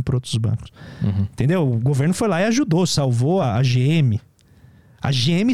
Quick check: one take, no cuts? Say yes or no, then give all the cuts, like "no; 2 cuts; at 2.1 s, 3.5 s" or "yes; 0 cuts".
yes; 0 cuts